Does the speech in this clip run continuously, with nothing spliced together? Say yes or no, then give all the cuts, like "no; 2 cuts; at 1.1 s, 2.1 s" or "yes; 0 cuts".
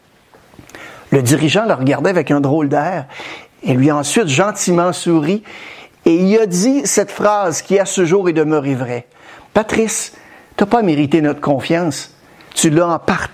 yes; 0 cuts